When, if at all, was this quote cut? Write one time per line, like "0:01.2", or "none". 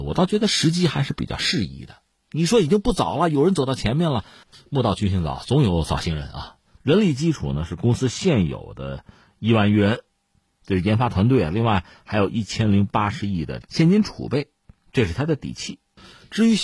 0:06.8